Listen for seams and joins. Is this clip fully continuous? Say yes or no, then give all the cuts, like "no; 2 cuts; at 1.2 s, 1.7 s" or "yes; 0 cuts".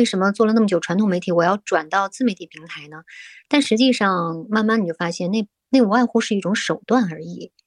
yes; 0 cuts